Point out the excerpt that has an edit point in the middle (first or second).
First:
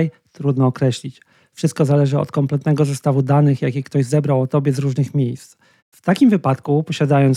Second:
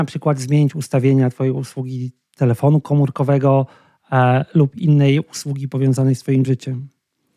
first